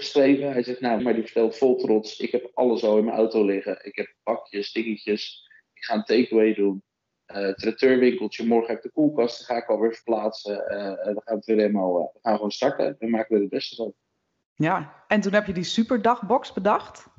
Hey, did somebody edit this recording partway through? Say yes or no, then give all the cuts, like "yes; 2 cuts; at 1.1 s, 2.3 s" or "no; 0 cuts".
yes; 1 cut; at 1.0 s